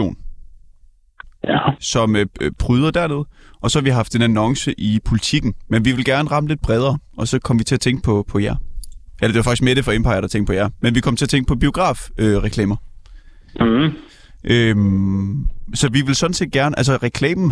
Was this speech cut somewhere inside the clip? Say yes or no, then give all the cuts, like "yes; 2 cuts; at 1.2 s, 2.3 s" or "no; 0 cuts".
no; 0 cuts